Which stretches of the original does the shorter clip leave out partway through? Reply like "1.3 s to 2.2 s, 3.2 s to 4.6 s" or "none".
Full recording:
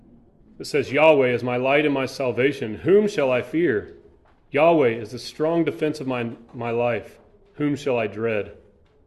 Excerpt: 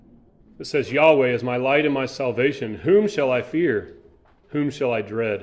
4.4 s to 7.5 s